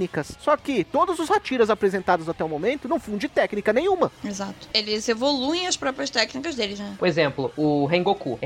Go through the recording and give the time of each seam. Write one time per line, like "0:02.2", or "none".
0:07.0